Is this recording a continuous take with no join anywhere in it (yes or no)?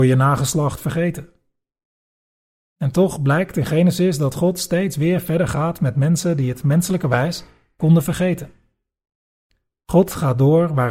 yes